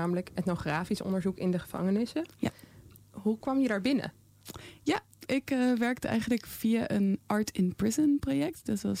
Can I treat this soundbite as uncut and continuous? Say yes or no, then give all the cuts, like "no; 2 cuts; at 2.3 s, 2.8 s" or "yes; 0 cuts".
no; 2 cuts; at 5.3 s, 7.2 s